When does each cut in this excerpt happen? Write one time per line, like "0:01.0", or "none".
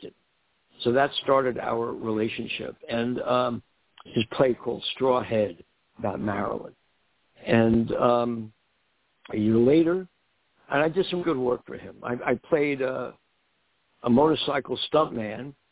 0:11.2